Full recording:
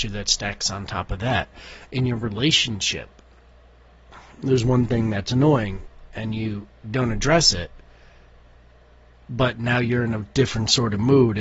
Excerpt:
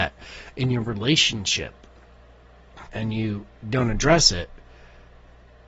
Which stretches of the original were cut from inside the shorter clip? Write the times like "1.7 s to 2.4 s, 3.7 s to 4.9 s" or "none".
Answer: 4.2 s to 6.1 s